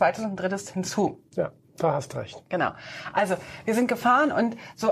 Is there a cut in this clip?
no; 0 cuts

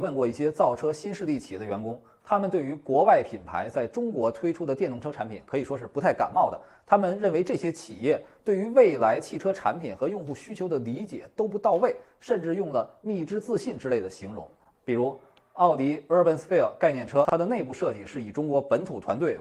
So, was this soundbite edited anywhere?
yes; 1 cut; at 14.7 s

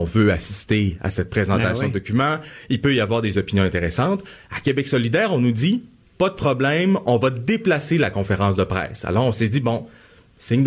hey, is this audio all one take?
yes; 0 cuts

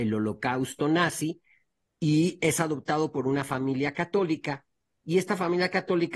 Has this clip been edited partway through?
no; 0 cuts

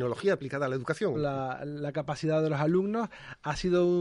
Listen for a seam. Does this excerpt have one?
yes; 1 cut; at 1.1 s

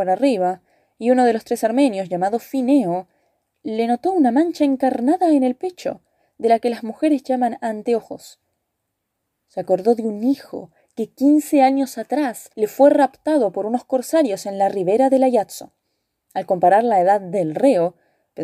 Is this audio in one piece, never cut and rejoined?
yes; 0 cuts

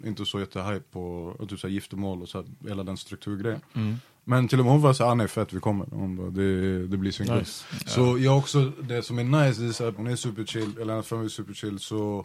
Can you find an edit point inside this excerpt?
yes; 1 cut; at 10.0 s

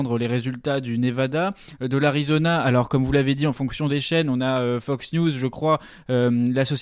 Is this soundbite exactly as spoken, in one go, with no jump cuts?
yes; 0 cuts

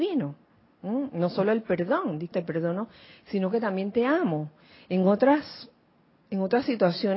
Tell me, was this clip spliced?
yes; 1 cut; at 2.3 s

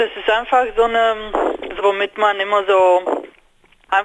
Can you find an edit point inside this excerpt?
yes; 1 cut; at 1.8 s

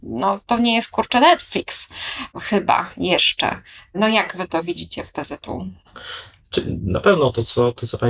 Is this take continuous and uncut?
yes; 0 cuts

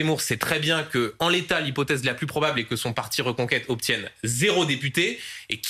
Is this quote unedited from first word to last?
yes; 0 cuts

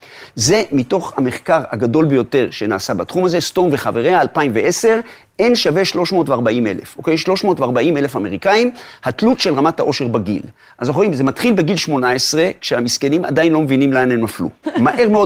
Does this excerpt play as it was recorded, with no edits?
yes; 0 cuts

